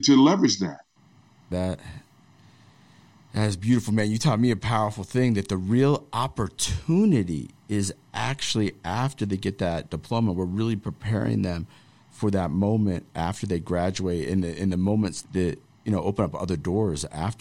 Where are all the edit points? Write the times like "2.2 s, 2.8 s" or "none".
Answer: 1.5 s, 15.2 s